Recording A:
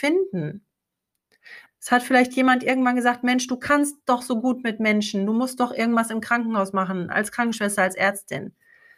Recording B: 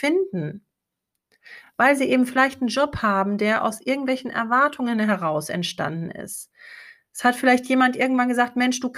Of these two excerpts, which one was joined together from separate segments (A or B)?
A